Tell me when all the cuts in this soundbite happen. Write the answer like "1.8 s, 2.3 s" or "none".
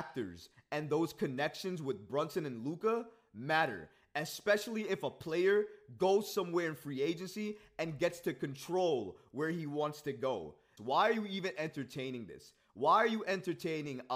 10.8 s